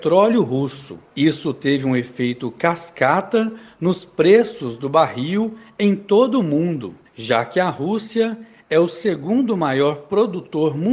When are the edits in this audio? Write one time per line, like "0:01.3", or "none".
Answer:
0:01.1